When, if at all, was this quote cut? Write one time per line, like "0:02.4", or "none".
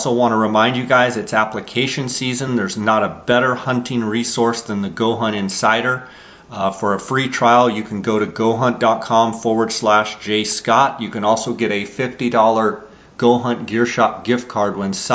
none